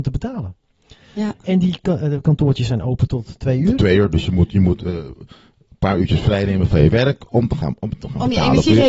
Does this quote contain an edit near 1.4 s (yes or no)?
no